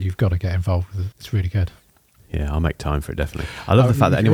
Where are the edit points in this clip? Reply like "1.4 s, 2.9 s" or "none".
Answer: 1.1 s